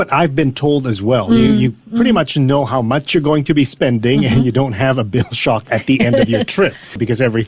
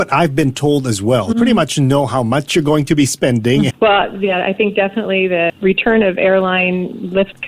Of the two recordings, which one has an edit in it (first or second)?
second